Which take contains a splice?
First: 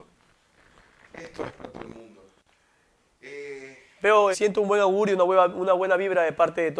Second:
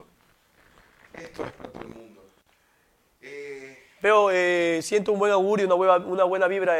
first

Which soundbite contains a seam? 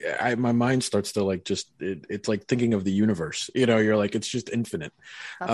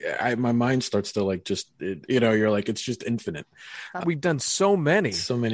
second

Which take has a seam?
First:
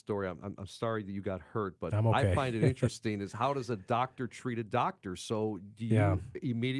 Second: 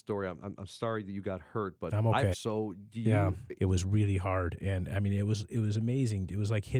second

